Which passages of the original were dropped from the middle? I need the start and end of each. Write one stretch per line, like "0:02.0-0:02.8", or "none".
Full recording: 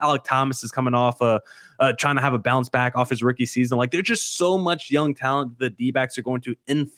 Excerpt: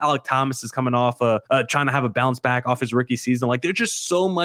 0:01.5-0:01.7